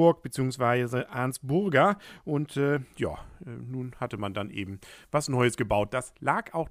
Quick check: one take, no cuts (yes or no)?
yes